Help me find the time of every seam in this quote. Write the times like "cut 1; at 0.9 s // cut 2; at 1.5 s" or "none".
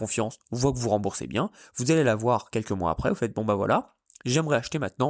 none